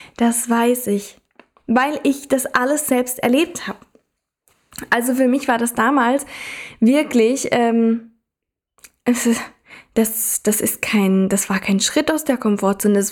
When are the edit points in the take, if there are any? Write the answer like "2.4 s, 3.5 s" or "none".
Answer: none